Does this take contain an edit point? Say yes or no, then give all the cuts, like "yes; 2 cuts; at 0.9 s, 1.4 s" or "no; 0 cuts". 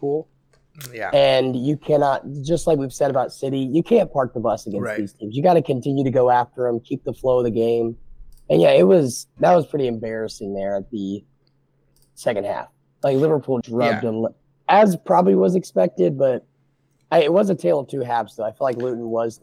yes; 1 cut; at 13.6 s